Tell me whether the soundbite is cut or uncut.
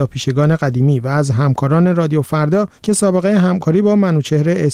cut